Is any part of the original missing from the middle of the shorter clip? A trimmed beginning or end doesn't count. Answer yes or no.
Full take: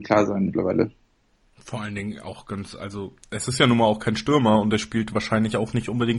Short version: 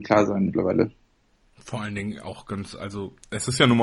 no